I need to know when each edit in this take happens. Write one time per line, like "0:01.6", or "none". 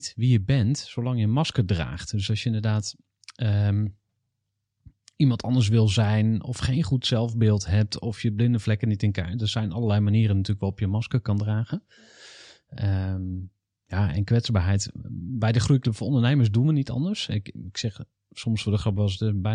none